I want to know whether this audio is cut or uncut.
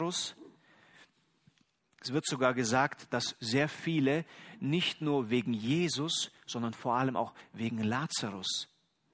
uncut